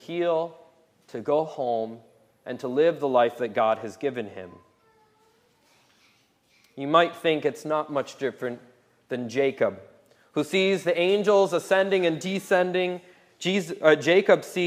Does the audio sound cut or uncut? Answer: uncut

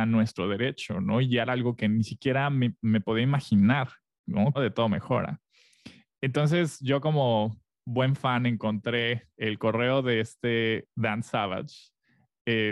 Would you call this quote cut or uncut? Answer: cut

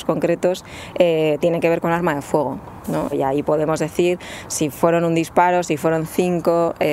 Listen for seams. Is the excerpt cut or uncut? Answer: cut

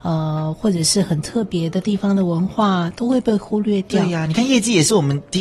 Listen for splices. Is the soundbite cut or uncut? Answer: uncut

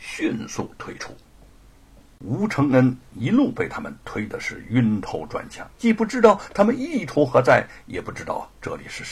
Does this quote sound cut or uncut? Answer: cut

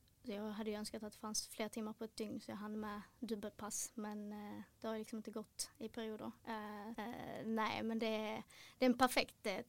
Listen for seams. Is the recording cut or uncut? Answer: cut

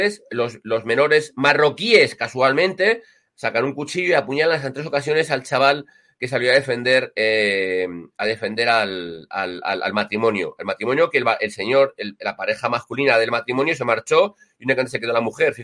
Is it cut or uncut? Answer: uncut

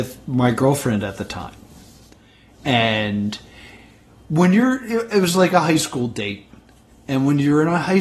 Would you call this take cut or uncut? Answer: uncut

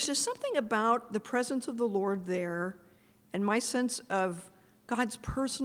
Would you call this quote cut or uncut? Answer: uncut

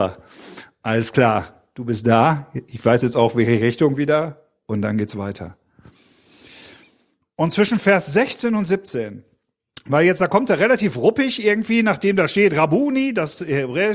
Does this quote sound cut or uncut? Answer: uncut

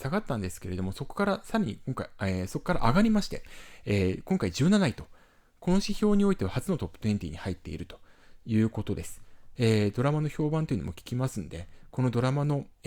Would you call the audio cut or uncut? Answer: cut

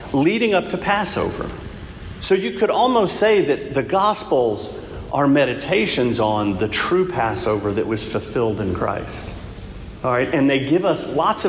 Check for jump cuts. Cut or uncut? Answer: uncut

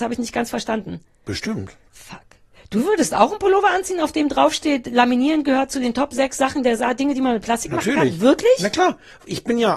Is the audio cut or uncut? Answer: cut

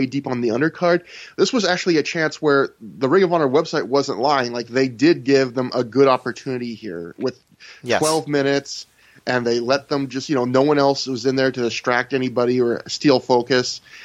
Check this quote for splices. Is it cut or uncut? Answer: uncut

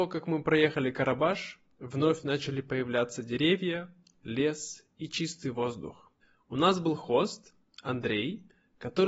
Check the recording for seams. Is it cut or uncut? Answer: cut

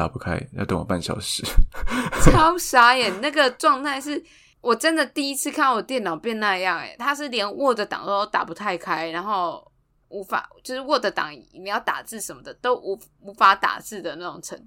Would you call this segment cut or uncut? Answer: uncut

